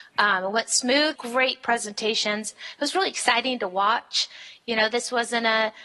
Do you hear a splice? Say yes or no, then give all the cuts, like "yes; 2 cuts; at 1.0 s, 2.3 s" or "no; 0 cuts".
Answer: yes; 1 cut; at 1.2 s